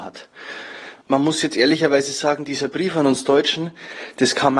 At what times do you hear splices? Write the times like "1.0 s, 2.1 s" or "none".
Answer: 1.0 s